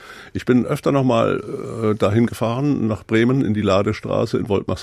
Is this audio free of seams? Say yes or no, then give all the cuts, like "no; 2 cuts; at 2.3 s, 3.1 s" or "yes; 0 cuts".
yes; 0 cuts